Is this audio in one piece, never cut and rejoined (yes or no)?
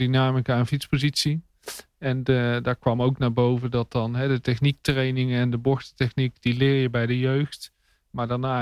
yes